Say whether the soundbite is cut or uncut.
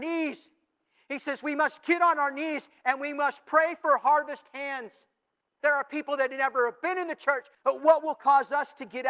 cut